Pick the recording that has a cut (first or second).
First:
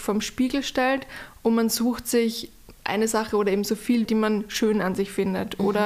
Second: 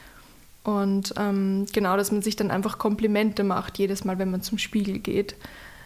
first